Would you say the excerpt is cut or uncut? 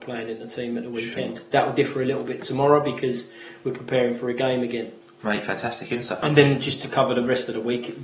cut